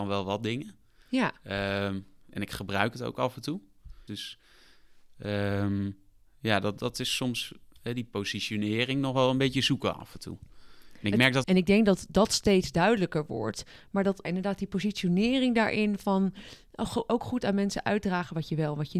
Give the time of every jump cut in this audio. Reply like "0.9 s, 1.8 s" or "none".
4.1 s, 11.4 s, 14.2 s